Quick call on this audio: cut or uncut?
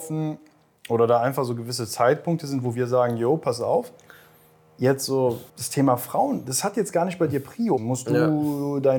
cut